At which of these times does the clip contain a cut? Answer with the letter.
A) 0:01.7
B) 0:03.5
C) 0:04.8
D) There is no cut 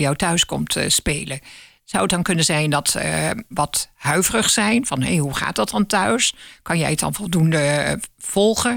B